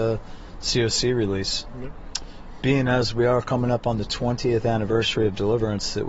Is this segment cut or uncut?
uncut